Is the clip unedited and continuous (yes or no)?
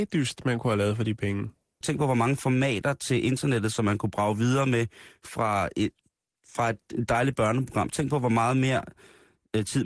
no